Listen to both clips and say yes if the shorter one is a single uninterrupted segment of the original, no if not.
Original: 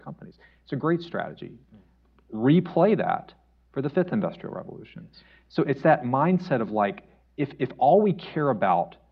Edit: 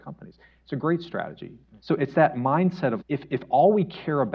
no